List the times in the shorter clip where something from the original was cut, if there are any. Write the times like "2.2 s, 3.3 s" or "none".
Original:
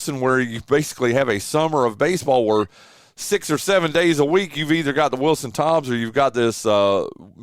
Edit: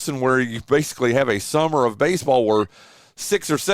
none